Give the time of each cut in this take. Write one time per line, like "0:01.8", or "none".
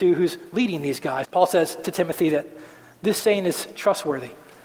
0:01.2